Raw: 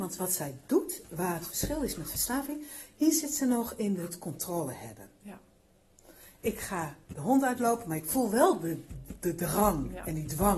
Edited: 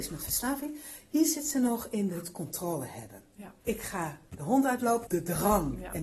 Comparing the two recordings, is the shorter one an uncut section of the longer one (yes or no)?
no